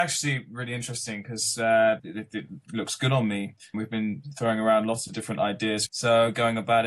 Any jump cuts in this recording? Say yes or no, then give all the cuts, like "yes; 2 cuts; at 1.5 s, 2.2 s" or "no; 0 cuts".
yes; 3 cuts; at 2.0 s, 3.7 s, 5.9 s